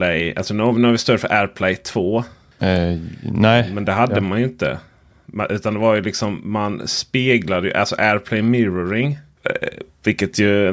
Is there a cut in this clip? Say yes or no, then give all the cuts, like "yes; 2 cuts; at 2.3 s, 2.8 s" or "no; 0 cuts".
yes; 2 cuts; at 2.6 s, 9.4 s